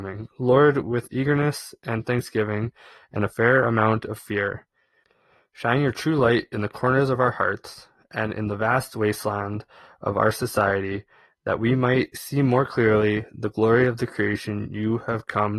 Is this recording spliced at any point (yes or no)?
no